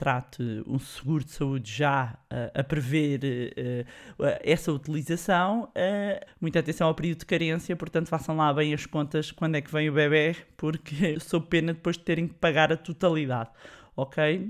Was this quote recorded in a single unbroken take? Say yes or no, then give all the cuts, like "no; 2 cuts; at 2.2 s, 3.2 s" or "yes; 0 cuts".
no; 2 cuts; at 6.3 s, 11.1 s